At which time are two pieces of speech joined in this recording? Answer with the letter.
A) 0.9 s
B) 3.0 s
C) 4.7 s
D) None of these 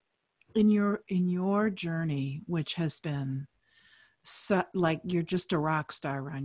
B